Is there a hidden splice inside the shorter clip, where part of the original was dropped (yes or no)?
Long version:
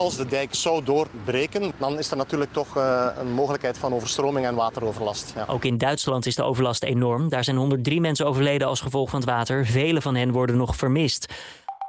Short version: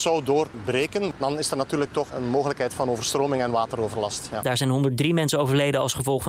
yes